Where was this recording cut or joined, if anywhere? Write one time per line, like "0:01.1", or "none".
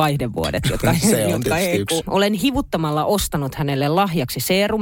0:02.0